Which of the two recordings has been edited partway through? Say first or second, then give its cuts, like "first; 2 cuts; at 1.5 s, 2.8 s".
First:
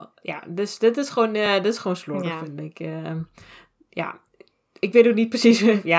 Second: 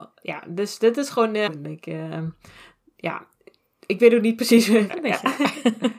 second; 2 cuts; at 1.5 s, 4.9 s